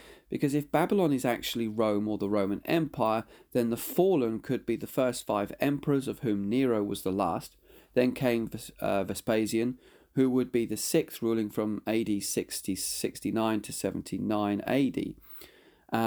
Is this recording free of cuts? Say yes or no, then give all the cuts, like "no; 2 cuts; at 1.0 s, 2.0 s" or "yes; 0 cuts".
yes; 0 cuts